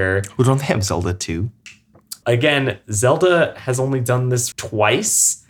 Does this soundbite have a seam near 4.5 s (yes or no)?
yes